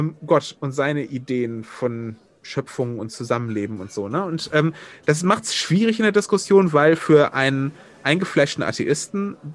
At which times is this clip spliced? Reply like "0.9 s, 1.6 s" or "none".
none